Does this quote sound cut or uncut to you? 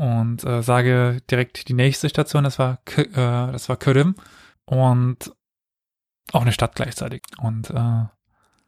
cut